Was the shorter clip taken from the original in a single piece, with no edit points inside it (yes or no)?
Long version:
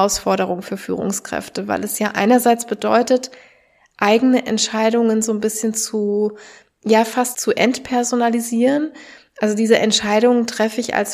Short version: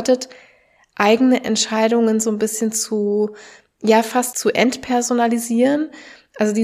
yes